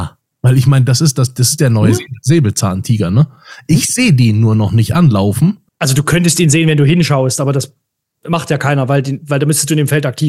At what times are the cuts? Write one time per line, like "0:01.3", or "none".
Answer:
0:05.7